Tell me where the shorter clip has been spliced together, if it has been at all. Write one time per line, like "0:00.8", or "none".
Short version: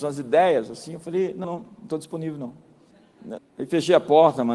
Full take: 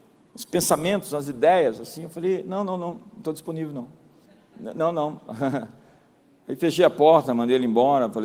0:01.4
0:03.4